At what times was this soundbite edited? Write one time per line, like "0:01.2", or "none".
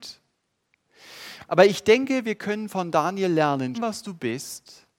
0:03.7